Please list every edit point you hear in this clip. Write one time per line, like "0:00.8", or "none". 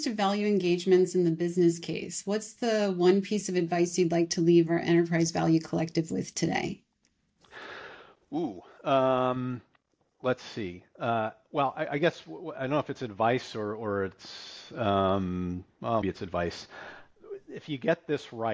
0:16.0